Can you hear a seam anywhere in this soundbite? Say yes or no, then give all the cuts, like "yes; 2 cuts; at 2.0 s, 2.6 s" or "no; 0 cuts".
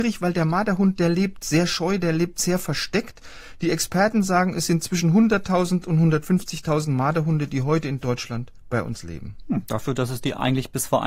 no; 0 cuts